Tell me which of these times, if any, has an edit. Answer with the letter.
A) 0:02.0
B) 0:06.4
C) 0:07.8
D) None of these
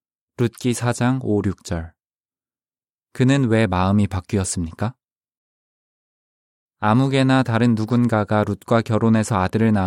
D